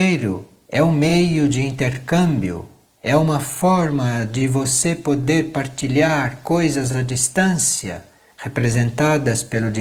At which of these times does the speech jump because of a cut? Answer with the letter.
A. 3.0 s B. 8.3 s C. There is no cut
A